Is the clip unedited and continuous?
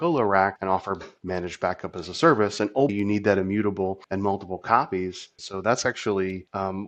no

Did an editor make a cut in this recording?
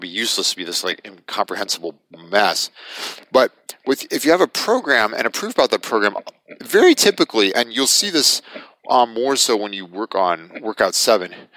no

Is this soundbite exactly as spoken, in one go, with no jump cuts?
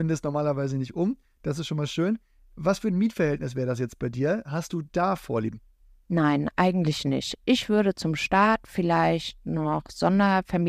yes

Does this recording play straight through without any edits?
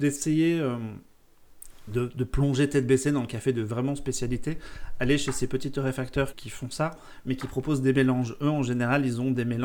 no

